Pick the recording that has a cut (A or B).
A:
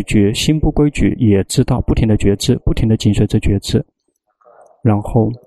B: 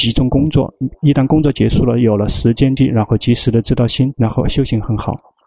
B